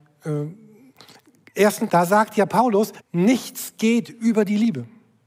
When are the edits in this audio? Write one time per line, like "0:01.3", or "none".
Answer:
0:01.9
0:03.0